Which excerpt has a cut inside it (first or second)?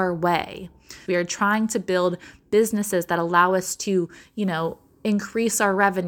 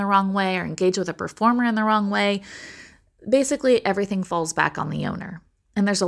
first